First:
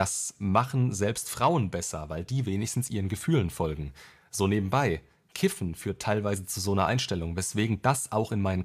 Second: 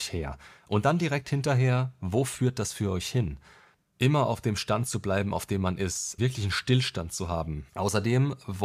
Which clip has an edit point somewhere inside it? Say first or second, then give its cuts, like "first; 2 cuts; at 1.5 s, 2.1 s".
second; 2 cuts; at 6.2 s, 7.7 s